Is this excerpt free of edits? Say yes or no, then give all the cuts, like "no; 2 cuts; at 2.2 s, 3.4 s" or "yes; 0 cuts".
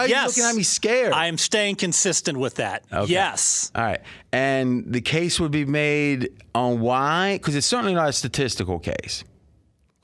yes; 0 cuts